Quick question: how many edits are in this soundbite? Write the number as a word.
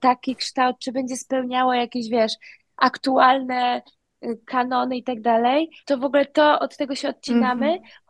one